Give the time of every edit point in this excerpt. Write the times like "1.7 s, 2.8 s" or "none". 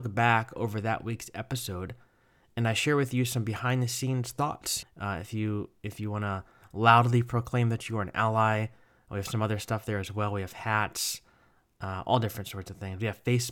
4.8 s